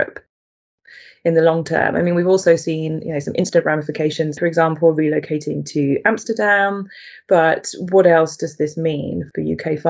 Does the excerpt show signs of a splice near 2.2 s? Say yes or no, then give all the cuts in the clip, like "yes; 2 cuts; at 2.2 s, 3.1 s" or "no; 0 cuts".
no; 1 cut; at 4.4 s